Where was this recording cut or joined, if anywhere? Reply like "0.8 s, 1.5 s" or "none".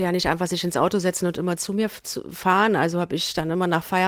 none